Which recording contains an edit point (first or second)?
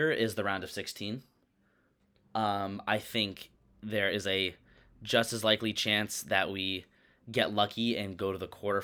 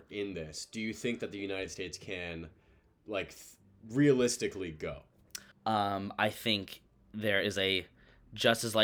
second